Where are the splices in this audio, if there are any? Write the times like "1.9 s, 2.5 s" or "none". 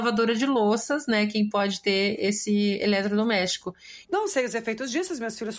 4.0 s